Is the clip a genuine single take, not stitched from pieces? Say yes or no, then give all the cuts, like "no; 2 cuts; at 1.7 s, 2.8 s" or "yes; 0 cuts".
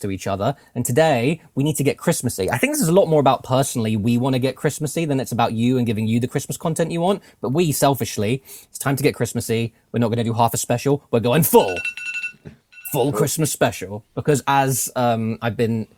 yes; 0 cuts